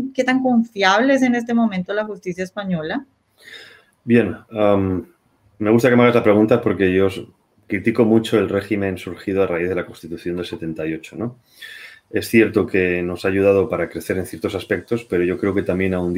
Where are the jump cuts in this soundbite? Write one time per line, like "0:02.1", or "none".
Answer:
none